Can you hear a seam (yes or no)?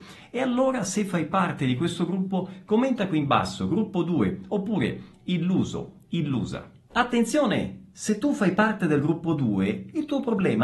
no